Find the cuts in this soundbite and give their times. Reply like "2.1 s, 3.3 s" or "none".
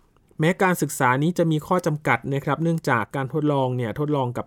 none